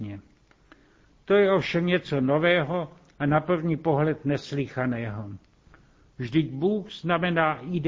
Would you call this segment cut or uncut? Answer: uncut